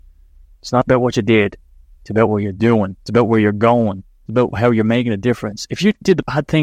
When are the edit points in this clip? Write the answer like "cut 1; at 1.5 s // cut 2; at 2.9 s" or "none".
cut 1; at 3.0 s